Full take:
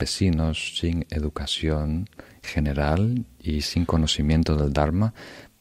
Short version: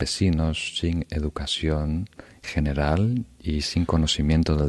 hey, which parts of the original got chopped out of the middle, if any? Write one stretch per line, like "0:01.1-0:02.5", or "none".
none

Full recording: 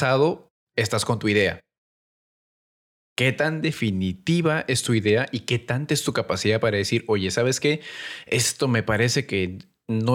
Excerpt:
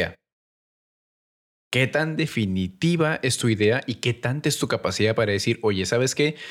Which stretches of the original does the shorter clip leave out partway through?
none

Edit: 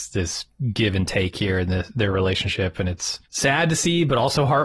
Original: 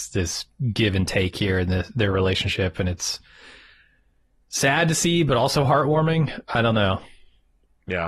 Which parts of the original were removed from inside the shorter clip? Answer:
0:03.2-0:04.4

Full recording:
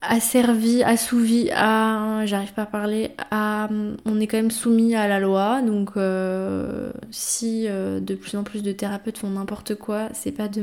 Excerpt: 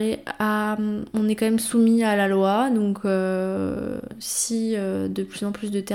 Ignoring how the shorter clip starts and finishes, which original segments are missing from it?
none

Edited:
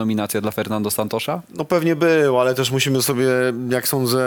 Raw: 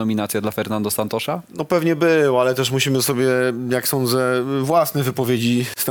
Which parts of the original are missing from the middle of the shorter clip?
none

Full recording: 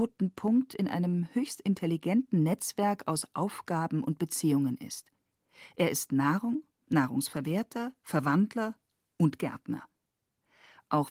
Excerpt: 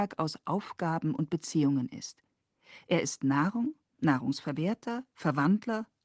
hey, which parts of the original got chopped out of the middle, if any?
none

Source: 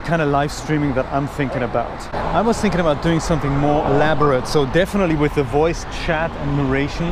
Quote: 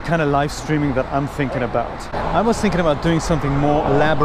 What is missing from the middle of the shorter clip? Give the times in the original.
none

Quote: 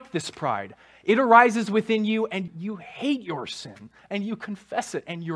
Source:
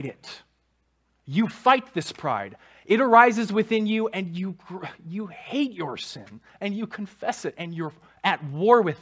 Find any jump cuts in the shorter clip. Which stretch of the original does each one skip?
0:04.3-0:05.0

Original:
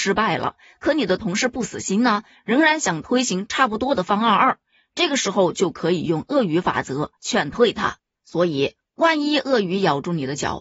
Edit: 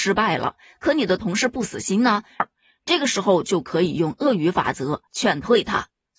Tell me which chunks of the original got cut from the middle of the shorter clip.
0:02.4-0:04.5

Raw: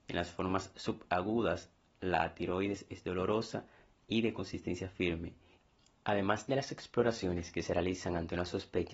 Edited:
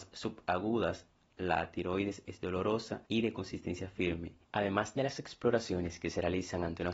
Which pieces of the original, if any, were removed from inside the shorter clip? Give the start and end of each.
0:03.7-0:04.0
0:05.4-0:06.0

